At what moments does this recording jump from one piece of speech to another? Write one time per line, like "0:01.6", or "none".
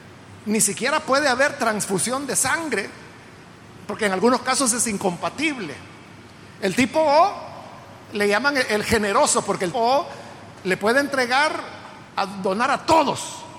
0:09.7
0:12.1